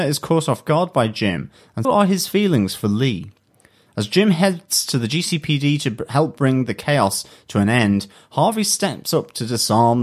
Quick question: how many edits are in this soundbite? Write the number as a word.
one